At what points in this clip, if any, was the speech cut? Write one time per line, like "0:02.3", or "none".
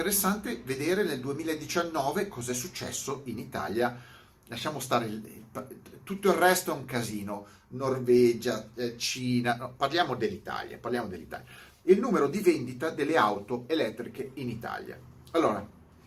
none